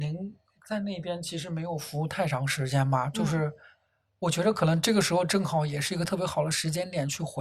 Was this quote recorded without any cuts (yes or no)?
yes